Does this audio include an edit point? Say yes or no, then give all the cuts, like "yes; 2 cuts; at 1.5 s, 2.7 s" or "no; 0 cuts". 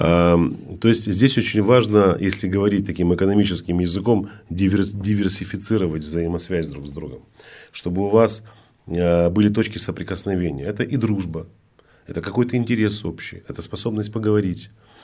no; 0 cuts